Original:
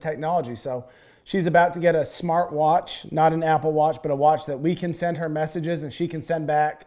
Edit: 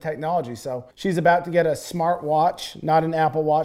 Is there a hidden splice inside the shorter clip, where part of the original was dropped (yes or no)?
yes